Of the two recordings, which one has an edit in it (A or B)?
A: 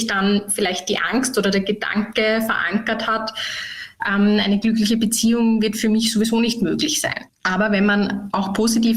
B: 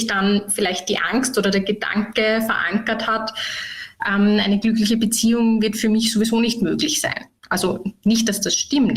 A